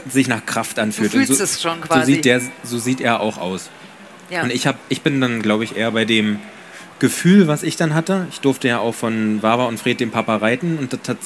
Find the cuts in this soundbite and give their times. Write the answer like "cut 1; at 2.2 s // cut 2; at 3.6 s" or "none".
none

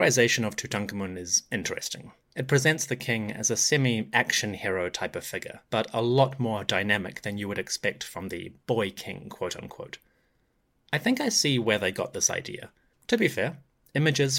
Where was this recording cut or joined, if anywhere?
cut 1; at 5.7 s // cut 2; at 12.9 s

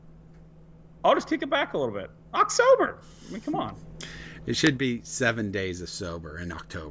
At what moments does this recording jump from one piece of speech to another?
none

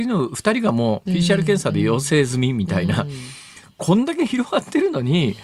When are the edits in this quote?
none

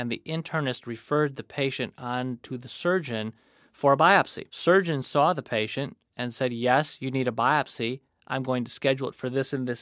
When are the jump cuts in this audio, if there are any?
none

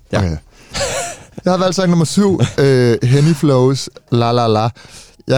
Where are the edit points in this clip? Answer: none

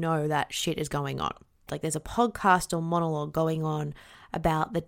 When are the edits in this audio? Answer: cut 1; at 1.7 s

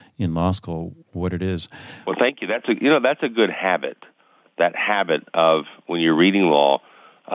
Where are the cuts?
none

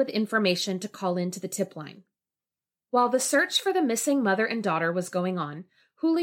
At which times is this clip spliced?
none

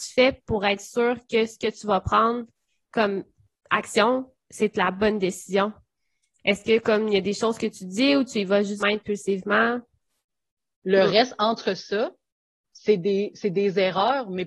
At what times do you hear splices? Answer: cut 1; at 8.8 s // cut 2; at 10.7 s

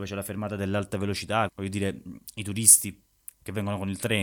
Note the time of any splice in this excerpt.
cut 1; at 1.5 s

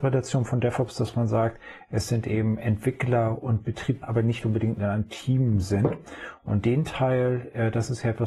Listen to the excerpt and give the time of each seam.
cut 1; at 4.0 s

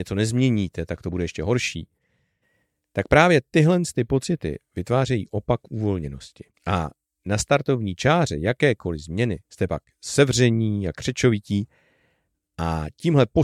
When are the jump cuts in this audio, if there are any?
cut 1; at 6.5 s // cut 2; at 9.4 s

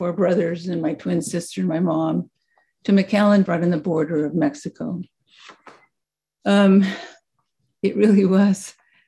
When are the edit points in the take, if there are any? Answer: cut 1; at 3.5 s

